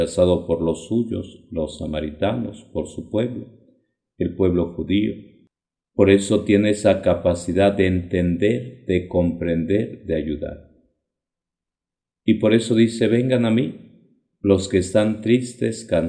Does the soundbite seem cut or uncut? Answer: uncut